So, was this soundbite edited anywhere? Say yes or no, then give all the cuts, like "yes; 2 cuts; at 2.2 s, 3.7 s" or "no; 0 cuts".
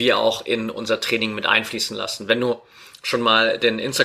no; 0 cuts